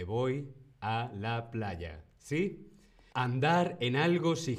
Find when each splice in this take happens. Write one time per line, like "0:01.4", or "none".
0:03.1